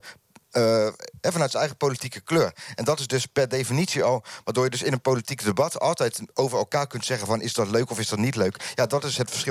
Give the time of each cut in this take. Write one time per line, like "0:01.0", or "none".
none